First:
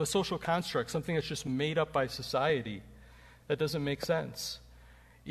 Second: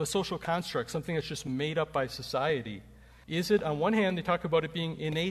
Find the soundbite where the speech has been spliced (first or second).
second